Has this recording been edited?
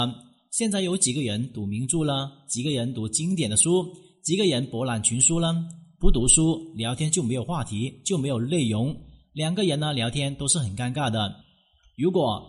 no; 0 cuts

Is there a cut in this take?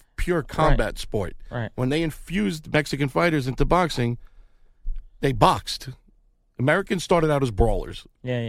no; 0 cuts

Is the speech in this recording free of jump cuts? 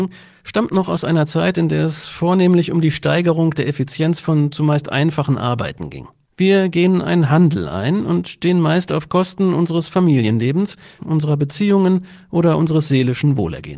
no; 2 cuts; at 6.3 s, 11.0 s

